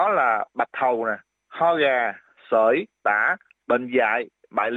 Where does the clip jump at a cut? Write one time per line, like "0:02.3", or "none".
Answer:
0:03.5